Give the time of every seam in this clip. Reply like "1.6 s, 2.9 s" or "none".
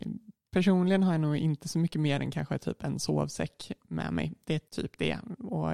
4.7 s